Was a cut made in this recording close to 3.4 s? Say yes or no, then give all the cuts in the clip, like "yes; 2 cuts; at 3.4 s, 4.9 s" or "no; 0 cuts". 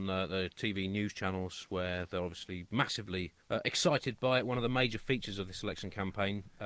yes; 1 cut; at 3.4 s